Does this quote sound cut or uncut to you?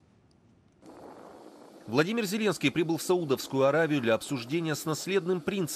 uncut